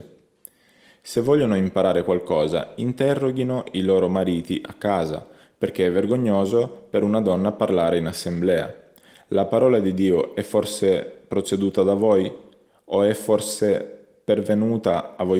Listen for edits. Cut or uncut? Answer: uncut